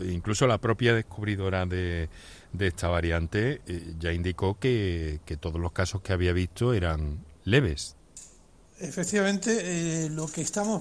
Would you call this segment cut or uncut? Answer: uncut